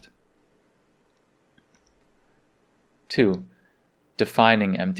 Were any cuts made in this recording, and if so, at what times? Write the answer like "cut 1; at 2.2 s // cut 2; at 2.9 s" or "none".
none